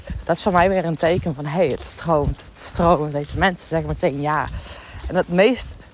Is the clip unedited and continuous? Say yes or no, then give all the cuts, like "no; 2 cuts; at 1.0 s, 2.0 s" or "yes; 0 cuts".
yes; 0 cuts